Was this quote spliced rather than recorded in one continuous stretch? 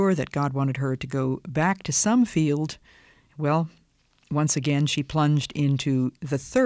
yes; 1 cut; at 3.3 s

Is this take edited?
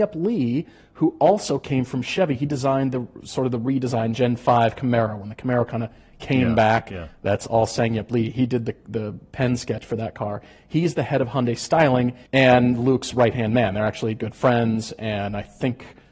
yes; 1 cut; at 12.3 s

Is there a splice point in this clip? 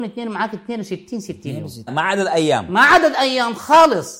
yes; 1 cut; at 1.9 s

